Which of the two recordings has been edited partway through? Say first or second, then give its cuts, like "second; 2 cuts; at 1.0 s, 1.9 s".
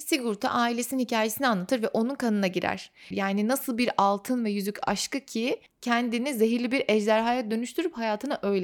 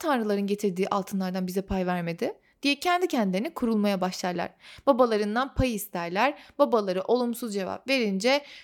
first; 1 cut; at 3.1 s